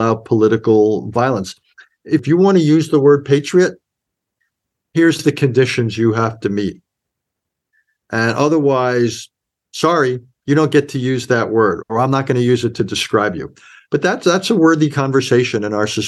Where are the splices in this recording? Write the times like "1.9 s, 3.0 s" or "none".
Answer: none